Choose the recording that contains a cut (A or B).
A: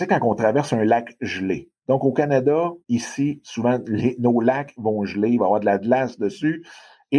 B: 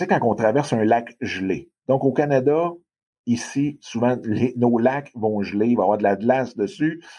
A